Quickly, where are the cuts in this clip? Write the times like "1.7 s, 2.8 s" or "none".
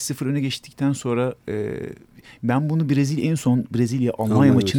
none